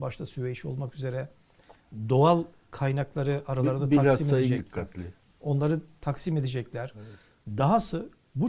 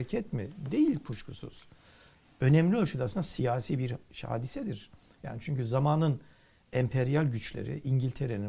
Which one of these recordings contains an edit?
first; 1 cut; at 4.6 s

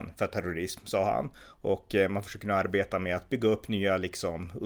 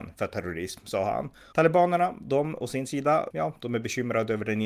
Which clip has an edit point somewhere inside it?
second; 2 cuts; at 1.5 s, 3.3 s

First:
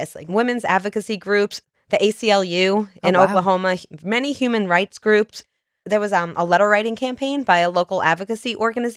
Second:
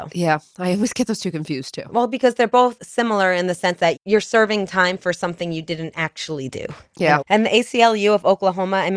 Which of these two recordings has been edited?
second; 2 cuts; at 4.0 s, 7.2 s

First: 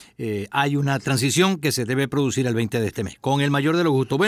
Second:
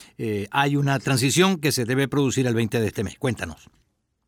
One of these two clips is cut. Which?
first; 1 cut; at 3.2 s

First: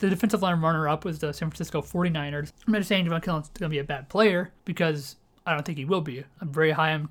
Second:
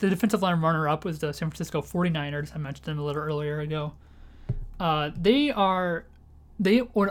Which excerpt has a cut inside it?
first; 2 cuts; at 2.5 s, 4.6 s

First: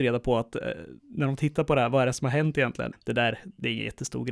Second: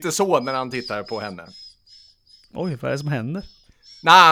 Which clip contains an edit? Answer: first; 2 cuts; at 1.0 s, 2.9 s

